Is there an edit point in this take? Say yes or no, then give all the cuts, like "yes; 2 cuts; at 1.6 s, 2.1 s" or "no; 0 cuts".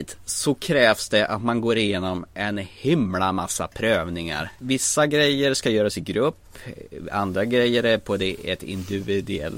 no; 0 cuts